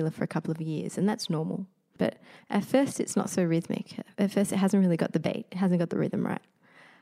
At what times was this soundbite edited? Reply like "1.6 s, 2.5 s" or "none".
2.0 s